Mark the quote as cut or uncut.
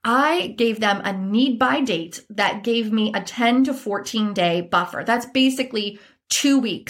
uncut